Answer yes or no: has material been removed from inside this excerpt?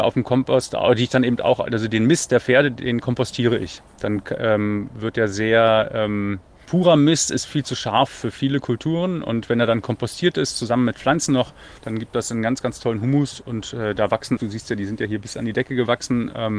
yes